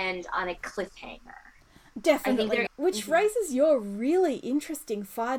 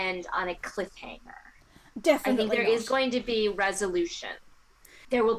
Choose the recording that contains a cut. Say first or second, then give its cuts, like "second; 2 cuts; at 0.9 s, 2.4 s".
first; 1 cut; at 2.7 s